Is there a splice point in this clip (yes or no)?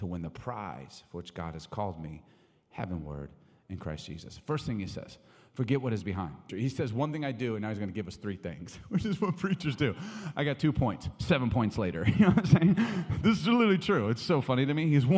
yes